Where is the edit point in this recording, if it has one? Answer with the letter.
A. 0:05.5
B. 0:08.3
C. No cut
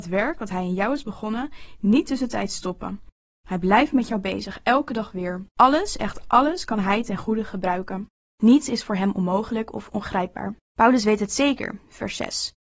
A